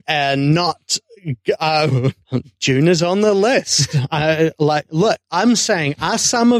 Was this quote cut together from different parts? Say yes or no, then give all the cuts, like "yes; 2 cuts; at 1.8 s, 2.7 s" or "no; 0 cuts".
no; 0 cuts